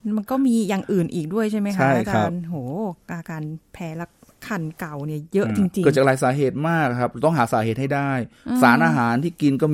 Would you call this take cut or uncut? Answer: uncut